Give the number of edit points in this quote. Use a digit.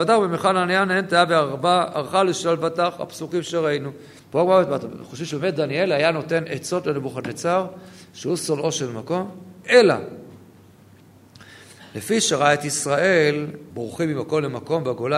2